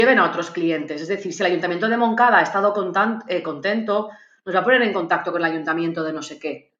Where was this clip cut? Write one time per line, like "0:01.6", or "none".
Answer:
none